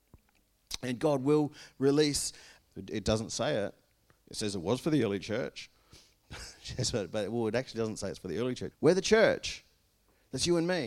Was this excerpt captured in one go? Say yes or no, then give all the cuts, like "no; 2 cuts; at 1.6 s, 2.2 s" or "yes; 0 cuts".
no; 2 cuts; at 2.6 s, 8.7 s